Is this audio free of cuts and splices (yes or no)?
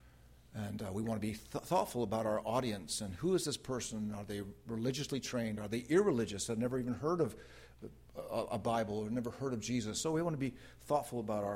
yes